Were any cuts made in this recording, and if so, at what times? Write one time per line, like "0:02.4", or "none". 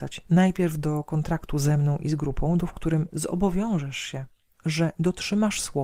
0:02.6